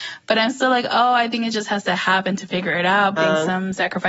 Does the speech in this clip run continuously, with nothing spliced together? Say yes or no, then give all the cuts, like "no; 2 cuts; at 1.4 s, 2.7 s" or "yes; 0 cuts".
no; 1 cut; at 3.2 s